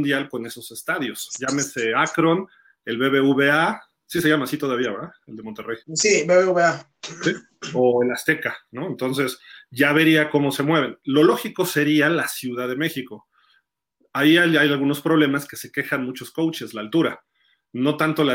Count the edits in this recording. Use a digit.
1